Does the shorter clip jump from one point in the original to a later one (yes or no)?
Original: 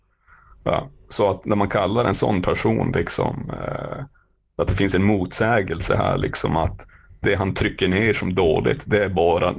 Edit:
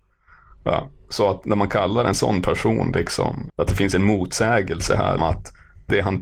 yes